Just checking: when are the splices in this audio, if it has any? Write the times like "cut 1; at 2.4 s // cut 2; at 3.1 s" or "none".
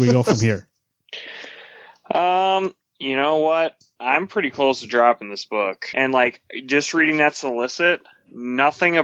cut 1; at 5.9 s